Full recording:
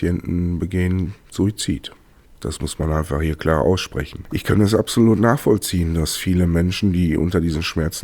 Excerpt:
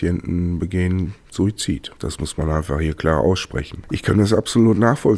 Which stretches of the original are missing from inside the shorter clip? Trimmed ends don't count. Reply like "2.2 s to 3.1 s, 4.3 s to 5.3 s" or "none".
1.9 s to 2.4 s